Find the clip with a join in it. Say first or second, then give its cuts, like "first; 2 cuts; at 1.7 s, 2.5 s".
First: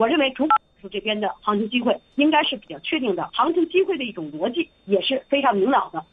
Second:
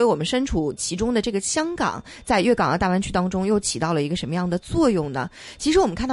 first; 1 cut; at 3.3 s